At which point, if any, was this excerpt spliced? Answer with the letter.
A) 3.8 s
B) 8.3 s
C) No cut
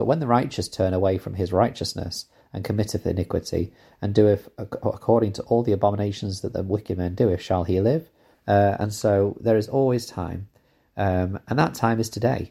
B